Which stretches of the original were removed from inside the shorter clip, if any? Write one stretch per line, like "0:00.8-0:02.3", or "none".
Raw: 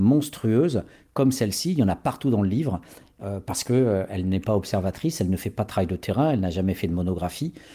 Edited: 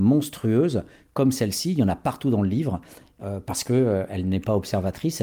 none

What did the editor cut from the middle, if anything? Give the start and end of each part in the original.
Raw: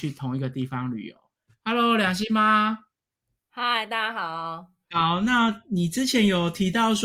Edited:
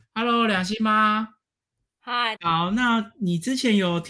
0:03.9-0:04.9

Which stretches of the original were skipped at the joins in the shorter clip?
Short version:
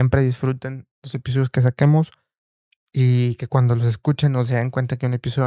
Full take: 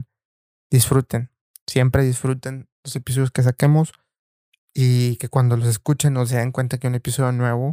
none

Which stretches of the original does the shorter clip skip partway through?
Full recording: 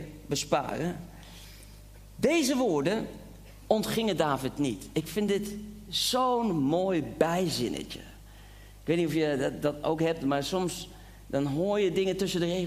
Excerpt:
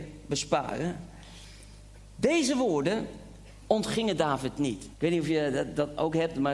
0:04.9-0:08.8

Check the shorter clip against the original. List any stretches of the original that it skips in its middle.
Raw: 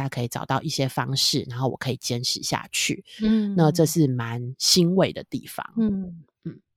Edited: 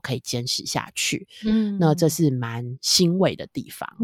none

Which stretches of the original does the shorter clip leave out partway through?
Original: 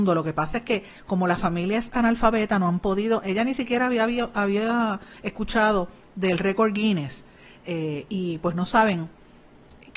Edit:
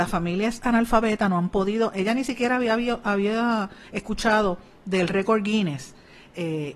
none

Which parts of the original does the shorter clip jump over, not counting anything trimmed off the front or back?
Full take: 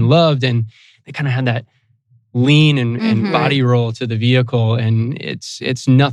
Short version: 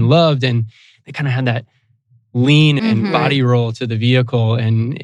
0:02.8-0:03.0

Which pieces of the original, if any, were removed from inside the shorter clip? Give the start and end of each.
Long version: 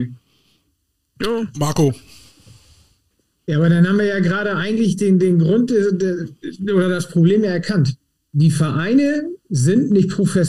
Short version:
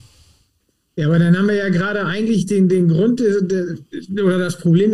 none

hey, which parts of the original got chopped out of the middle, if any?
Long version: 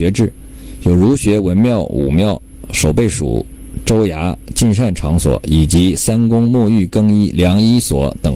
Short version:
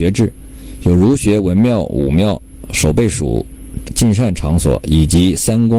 0:03.8-0:04.4

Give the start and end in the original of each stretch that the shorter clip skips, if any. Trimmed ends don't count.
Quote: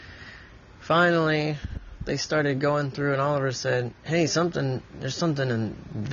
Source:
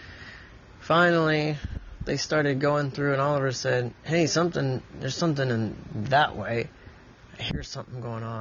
none

